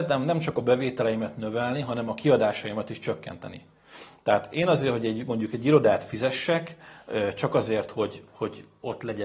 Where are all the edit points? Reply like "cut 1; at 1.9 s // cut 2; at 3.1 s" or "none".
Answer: none